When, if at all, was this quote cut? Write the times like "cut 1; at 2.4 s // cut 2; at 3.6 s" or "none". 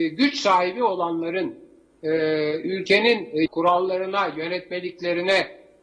cut 1; at 3.5 s